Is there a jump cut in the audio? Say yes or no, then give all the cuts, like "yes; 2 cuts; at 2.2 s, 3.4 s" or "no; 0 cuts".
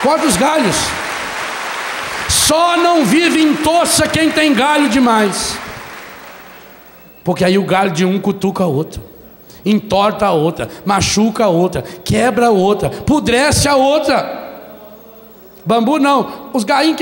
no; 0 cuts